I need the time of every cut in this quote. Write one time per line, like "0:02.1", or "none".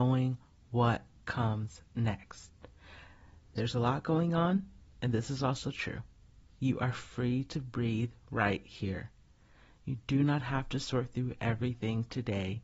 none